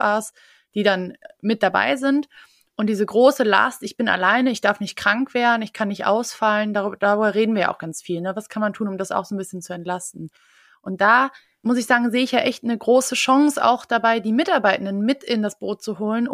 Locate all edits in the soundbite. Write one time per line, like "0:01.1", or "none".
none